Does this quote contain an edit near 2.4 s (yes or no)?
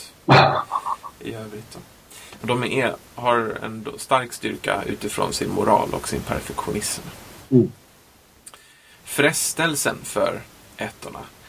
yes